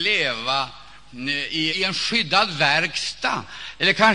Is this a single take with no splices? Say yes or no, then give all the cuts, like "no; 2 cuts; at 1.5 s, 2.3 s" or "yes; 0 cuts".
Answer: no; 1 cut; at 1.7 s